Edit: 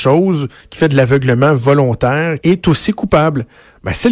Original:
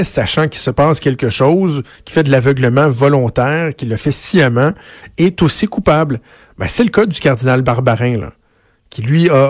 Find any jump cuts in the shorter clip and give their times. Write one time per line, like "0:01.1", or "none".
0:02.4